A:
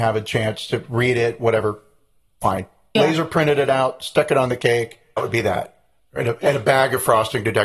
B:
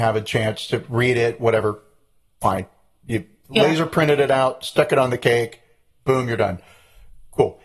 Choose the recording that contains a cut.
A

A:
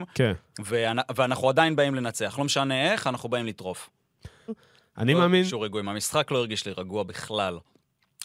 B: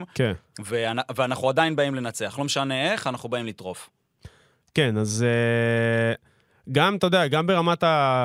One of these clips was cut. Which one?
A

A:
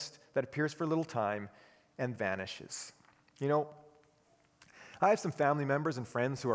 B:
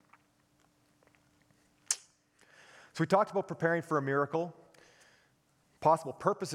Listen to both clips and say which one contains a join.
A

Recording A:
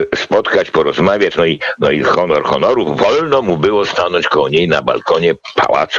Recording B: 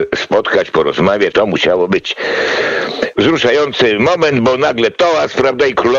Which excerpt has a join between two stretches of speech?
B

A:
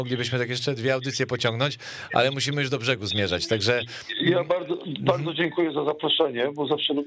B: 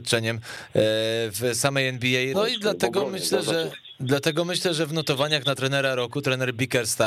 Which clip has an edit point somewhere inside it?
B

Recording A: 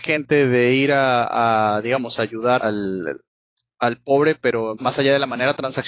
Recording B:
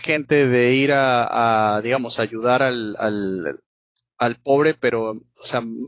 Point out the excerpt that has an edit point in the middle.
A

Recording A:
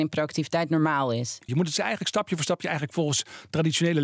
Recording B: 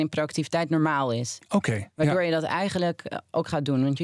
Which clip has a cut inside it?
A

